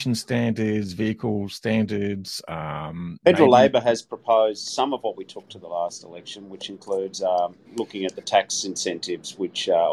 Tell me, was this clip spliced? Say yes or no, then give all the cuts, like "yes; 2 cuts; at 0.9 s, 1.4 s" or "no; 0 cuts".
yes; 1 cut; at 7.6 s